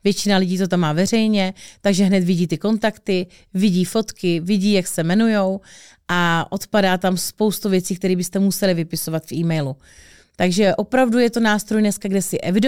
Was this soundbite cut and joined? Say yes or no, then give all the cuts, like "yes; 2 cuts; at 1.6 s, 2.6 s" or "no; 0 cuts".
no; 0 cuts